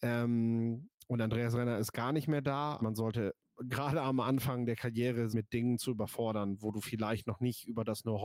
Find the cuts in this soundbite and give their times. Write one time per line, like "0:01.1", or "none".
0:02.8
0:05.3